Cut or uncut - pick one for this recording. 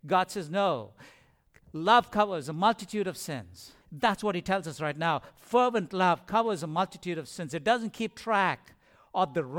cut